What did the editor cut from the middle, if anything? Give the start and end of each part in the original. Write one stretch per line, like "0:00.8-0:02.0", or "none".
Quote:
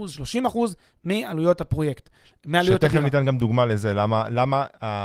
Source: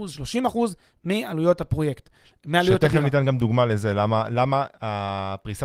none